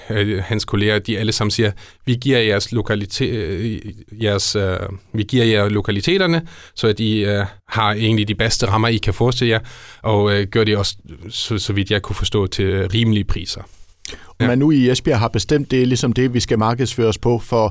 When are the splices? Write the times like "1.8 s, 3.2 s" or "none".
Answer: 7.6 s, 14.4 s